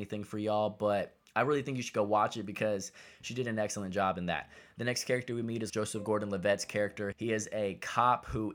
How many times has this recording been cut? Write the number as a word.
two